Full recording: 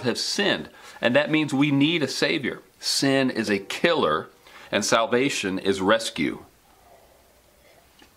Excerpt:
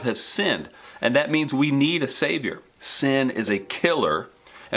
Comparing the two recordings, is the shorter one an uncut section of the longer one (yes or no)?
yes